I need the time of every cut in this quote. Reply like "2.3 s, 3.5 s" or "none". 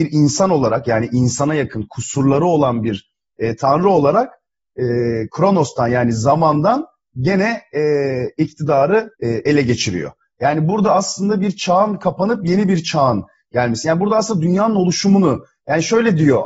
9.1 s